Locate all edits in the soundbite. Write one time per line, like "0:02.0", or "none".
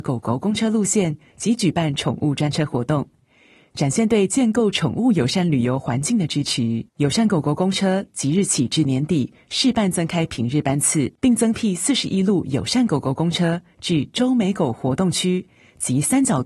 0:06.9
0:11.2